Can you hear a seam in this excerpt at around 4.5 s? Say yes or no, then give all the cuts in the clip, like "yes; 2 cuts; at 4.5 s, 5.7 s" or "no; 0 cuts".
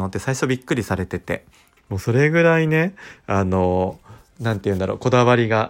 no; 2 cuts; at 1.8 s, 3.2 s